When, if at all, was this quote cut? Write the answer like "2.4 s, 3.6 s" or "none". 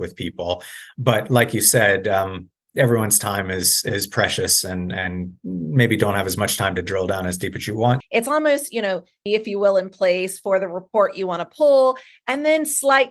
8.0 s, 9.3 s